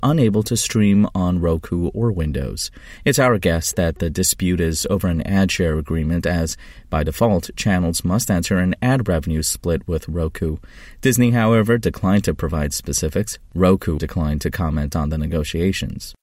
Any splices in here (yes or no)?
yes